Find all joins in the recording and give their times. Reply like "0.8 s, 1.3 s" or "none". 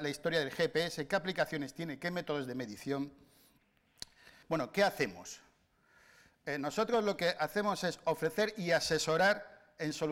4.4 s